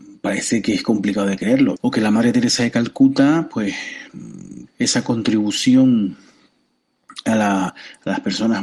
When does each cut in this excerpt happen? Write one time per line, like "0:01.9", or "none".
0:01.8
0:04.7
0:07.7